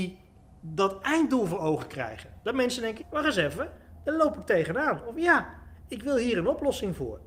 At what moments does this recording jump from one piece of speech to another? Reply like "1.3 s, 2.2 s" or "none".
3.0 s